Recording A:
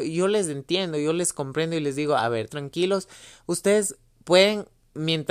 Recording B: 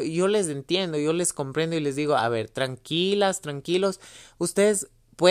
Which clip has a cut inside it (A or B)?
A